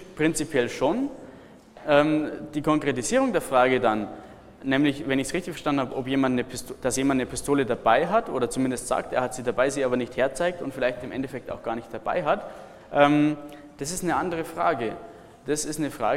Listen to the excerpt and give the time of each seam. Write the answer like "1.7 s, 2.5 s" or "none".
none